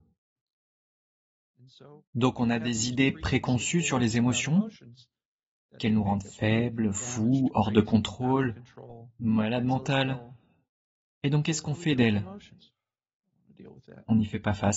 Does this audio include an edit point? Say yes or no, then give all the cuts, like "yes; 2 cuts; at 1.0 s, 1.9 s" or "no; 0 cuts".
no; 0 cuts